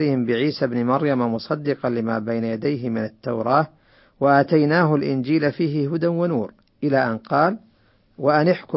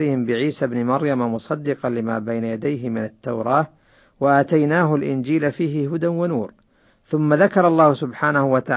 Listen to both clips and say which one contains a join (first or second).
first